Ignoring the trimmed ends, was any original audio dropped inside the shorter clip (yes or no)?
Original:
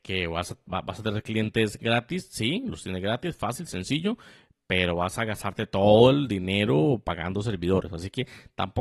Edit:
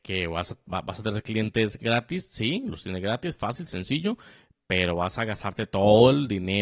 no